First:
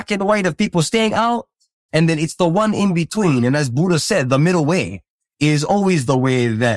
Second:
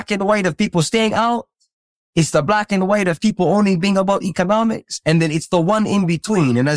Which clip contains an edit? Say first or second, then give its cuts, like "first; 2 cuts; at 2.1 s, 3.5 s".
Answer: first; 1 cut; at 1.9 s